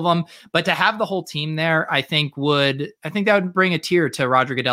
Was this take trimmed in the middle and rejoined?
yes; 1 cut; at 3.0 s

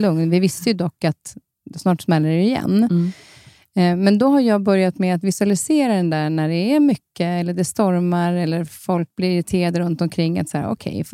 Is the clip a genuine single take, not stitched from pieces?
yes; 0 cuts

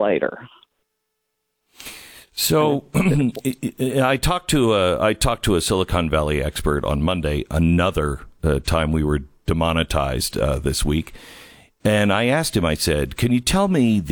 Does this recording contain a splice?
no; 0 cuts

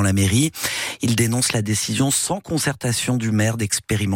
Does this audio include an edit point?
no; 0 cuts

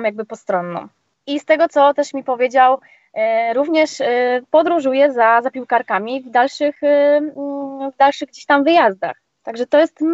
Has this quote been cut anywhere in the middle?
yes; 1 cut; at 1.1 s

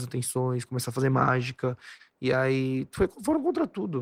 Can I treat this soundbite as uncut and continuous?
no; 1 cut; at 2.0 s

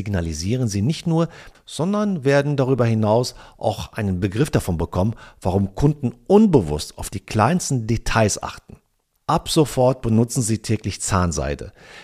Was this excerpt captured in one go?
no; 2 cuts; at 1.5 s, 9.2 s

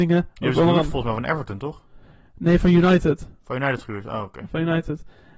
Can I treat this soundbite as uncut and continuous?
yes; 0 cuts

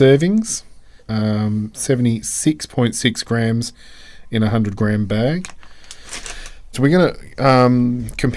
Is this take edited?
yes; 2 cuts; at 1.0 s, 6.7 s

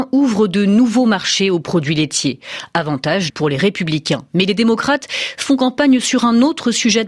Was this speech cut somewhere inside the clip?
yes; 1 cut; at 3.3 s

